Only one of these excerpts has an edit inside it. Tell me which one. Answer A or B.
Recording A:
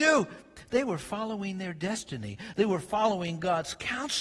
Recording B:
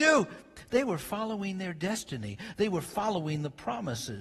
A